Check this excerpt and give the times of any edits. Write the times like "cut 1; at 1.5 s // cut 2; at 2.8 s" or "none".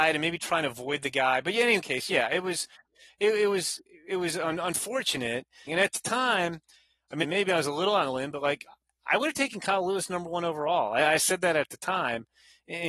cut 1; at 5.7 s // cut 2; at 7.2 s

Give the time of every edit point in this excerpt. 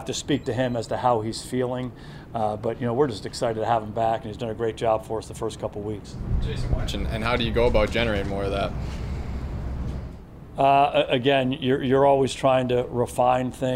cut 1; at 6.9 s

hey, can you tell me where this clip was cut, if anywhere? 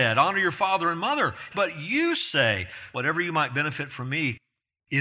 cut 1; at 1.5 s // cut 2; at 2.9 s

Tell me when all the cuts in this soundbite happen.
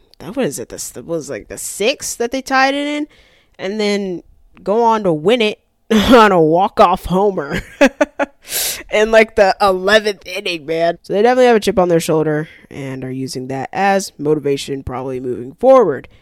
cut 1; at 10.9 s

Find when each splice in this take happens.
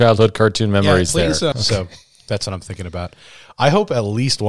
cut 1; at 1.5 s

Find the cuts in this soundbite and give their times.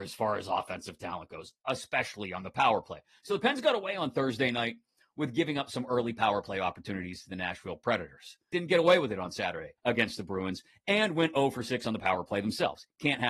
cut 1; at 8.5 s // cut 2; at 9.8 s

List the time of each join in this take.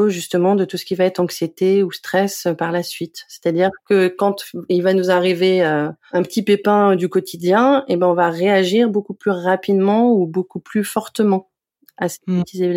none

